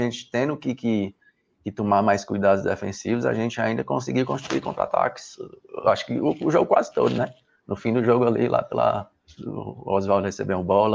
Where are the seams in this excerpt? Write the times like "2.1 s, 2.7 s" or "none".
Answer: 9.4 s